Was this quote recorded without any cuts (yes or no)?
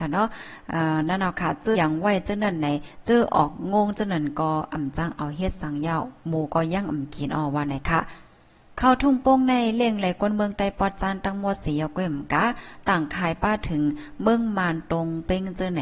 no